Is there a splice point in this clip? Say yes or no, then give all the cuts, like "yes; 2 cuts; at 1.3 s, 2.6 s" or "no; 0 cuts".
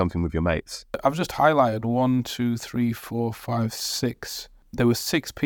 no; 0 cuts